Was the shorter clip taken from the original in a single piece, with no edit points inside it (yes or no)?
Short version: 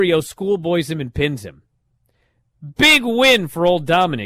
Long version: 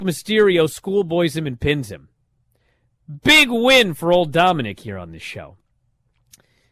yes